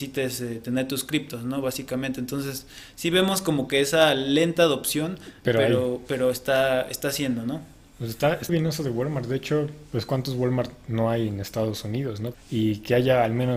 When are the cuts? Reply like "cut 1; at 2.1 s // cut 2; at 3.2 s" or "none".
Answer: cut 1; at 8.5 s // cut 2; at 12.3 s